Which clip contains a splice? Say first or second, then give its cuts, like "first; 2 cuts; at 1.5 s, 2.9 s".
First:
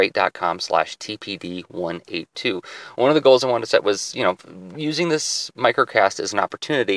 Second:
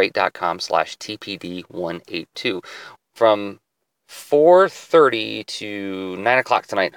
second; 1 cut; at 3.0 s